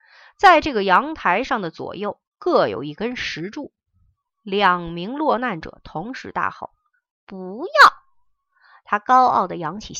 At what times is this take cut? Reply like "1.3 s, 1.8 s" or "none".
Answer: 4.3 s